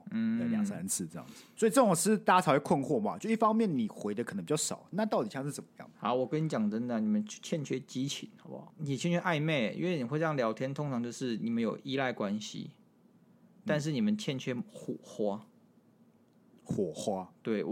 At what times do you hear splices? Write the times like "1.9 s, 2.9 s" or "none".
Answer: 4.9 s